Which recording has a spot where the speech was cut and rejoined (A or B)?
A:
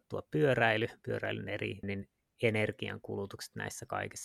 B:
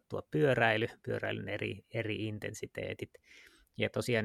A